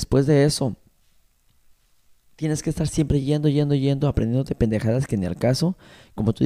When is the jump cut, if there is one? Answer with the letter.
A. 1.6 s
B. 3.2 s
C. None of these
C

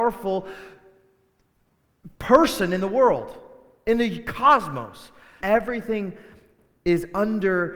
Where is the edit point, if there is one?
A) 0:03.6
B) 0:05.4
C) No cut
B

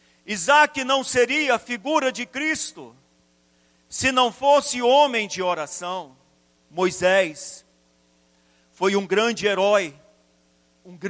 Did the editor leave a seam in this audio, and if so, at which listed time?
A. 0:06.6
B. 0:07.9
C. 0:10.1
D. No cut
A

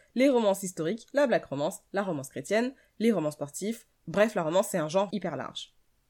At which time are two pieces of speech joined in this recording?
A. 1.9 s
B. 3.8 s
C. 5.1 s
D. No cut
C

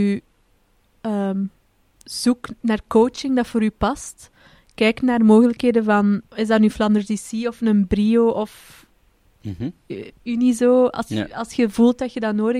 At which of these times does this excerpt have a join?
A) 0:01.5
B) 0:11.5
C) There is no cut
C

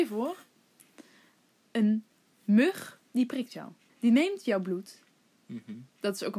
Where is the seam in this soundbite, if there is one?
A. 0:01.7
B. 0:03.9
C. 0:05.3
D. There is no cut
B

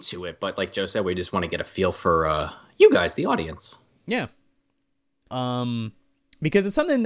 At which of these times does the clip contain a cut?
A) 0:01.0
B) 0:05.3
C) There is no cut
B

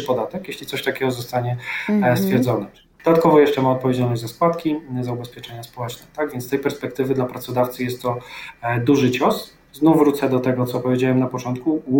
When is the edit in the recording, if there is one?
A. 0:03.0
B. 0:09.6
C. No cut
A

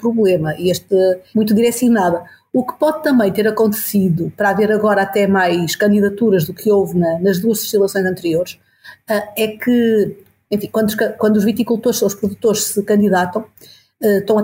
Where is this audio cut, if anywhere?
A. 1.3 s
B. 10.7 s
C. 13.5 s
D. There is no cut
A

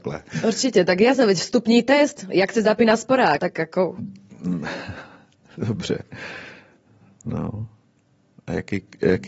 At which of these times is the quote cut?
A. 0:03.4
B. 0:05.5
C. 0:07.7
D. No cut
A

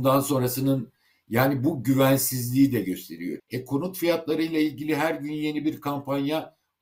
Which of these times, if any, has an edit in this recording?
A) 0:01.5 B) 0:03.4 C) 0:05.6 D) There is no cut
B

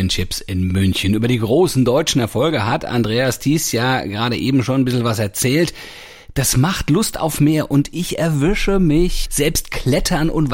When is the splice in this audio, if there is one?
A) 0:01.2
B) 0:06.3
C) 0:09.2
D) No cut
C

